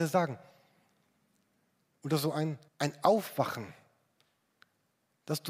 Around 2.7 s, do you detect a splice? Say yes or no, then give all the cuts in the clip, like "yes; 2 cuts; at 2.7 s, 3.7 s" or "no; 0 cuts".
yes; 1 cut; at 2.7 s